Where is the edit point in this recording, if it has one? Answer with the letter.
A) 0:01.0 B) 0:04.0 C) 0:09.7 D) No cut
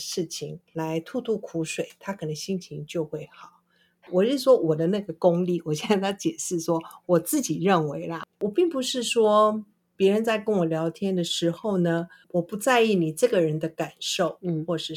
B